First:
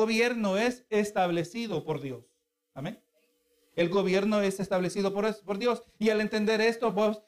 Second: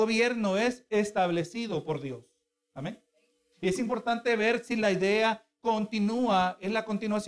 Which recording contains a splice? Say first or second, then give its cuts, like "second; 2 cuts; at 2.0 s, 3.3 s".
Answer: second; 1 cut; at 3.5 s